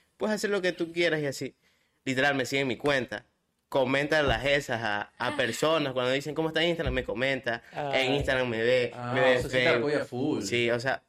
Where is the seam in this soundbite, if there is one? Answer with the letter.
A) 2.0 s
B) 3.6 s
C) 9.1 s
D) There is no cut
A